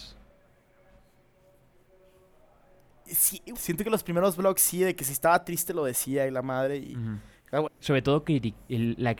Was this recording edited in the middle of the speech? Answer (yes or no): yes